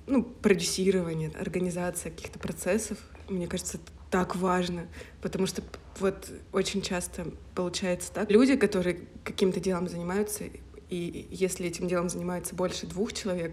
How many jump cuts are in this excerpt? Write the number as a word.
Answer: two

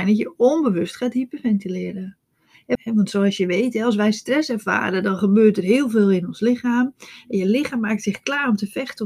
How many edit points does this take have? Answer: one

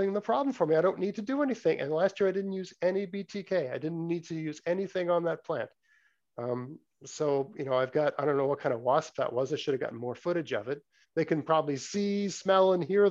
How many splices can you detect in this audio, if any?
one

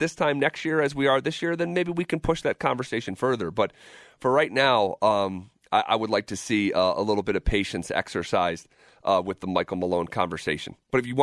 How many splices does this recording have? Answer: zero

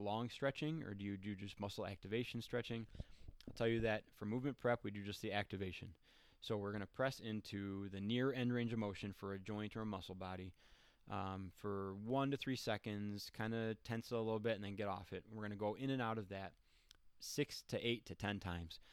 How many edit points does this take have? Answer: zero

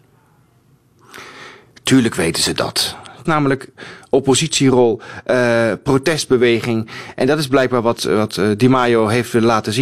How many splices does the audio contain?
two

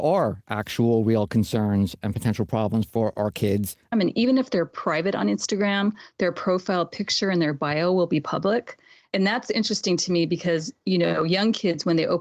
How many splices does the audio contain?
one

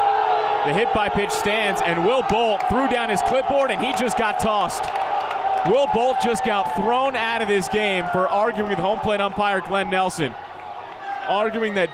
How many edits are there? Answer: zero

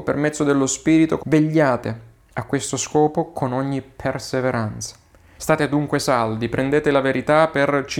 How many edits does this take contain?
two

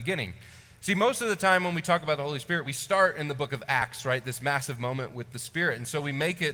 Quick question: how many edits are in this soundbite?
zero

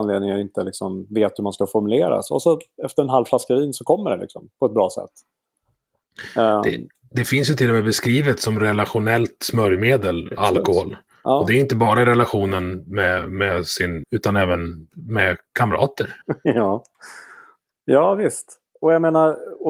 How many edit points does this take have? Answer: three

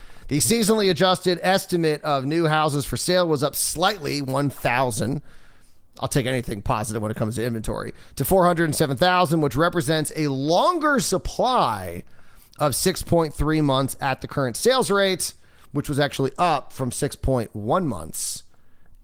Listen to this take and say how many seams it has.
zero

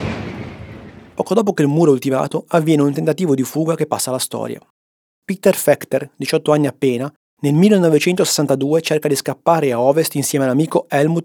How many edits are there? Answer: zero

